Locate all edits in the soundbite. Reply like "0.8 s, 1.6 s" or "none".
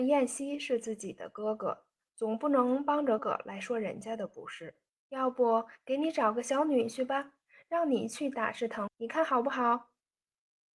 3.2 s, 5.0 s, 8.9 s

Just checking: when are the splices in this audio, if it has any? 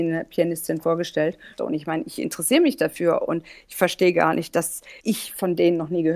1.6 s

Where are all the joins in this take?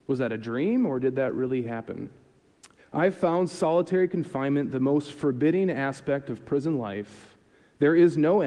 2.8 s

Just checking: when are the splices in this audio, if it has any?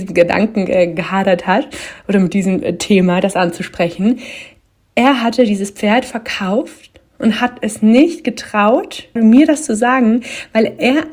9.2 s

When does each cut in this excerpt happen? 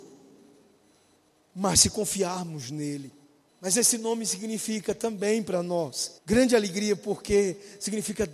3.5 s, 6.2 s

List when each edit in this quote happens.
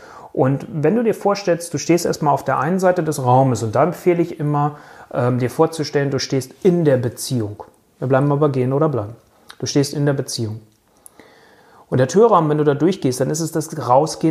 none

